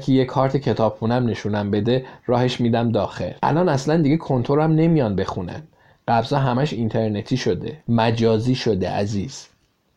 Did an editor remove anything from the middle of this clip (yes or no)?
yes